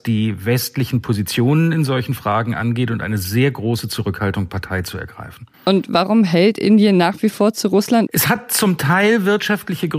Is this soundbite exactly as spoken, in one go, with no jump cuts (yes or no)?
no